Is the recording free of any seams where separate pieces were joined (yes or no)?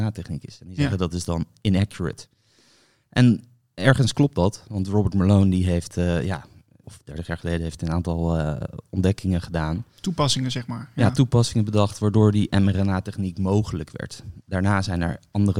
no